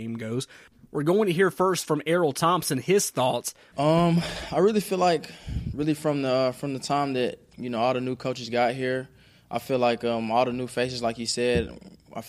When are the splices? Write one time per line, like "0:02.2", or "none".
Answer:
0:03.7